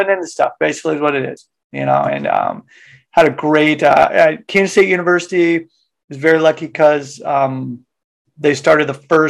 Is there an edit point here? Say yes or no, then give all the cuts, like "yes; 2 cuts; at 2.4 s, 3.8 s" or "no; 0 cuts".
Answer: no; 0 cuts